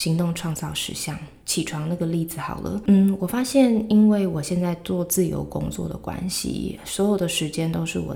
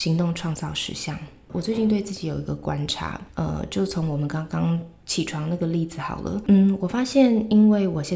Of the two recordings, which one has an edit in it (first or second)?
first